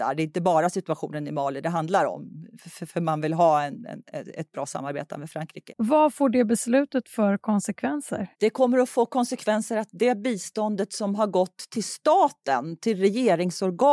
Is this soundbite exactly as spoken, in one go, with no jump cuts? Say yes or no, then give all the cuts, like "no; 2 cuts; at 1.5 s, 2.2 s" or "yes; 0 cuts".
no; 2 cuts; at 5.7 s, 8.3 s